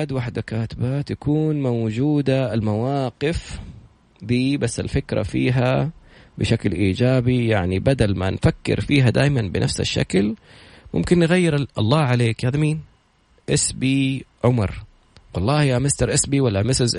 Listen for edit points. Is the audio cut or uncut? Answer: uncut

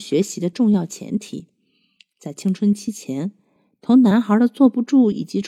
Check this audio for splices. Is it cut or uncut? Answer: uncut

